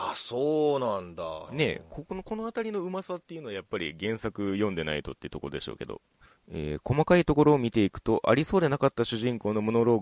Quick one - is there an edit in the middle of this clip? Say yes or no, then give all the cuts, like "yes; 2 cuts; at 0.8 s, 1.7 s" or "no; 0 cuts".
yes; 1 cut; at 1.5 s